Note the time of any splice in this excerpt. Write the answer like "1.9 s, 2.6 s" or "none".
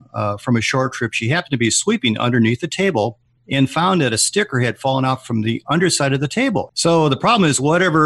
6.7 s